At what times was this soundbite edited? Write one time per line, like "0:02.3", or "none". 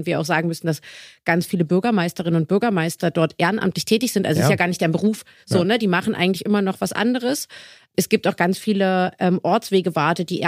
none

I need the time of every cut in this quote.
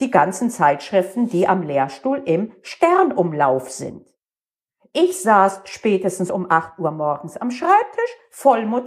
none

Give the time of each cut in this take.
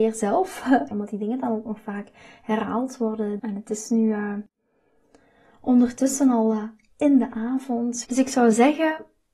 0:00.9
0:03.4
0:08.0

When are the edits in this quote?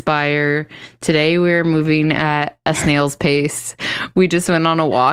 none

